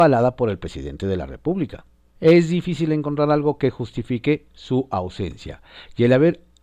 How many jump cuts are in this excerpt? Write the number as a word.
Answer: one